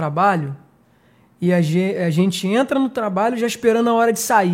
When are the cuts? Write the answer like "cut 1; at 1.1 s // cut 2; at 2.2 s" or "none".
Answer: none